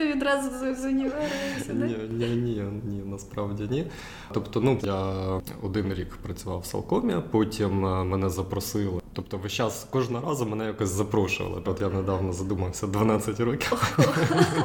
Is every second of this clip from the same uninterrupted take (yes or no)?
no